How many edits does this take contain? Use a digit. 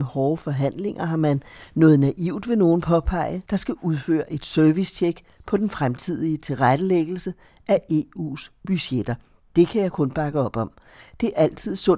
1